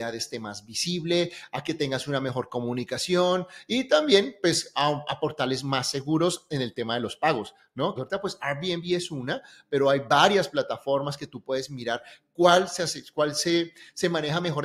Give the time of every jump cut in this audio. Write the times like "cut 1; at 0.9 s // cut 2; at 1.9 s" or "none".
cut 1; at 8.0 s